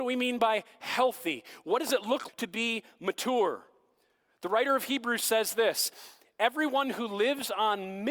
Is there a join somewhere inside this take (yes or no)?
yes